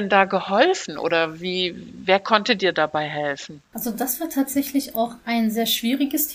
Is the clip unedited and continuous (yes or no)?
yes